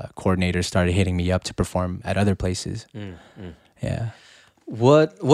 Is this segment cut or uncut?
uncut